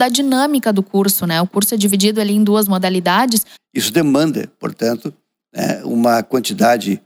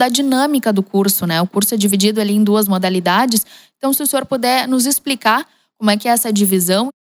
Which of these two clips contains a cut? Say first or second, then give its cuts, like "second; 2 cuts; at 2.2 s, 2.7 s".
first; 1 cut; at 3.6 s